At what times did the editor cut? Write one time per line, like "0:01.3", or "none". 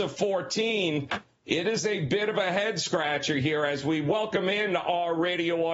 none